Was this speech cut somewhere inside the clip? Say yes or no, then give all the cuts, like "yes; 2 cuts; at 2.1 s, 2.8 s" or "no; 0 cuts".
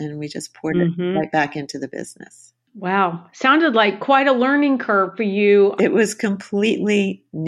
yes; 1 cut; at 5.8 s